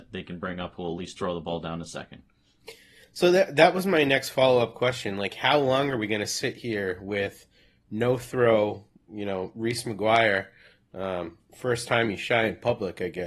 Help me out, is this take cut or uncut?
cut